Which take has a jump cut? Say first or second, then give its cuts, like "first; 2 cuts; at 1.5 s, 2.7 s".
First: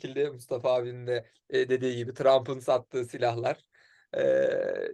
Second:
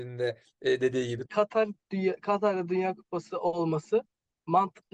second; 1 cut; at 1.3 s